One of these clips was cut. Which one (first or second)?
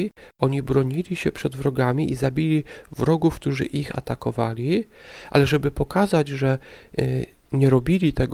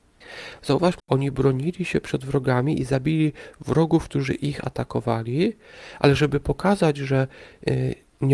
second